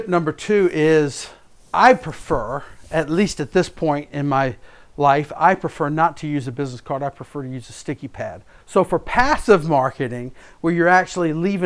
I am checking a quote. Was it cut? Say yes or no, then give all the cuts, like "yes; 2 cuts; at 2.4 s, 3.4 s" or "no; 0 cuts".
yes; 1 cut; at 8.6 s